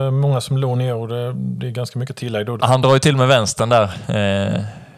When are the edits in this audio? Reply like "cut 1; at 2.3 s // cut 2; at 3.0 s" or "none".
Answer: cut 1; at 2.6 s